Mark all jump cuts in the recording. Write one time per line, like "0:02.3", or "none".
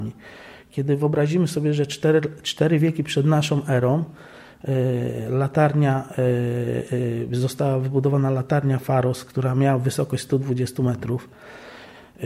none